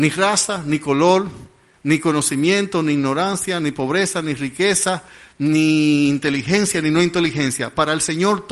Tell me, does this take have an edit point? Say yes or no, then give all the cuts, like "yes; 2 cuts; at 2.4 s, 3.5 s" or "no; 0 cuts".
no; 0 cuts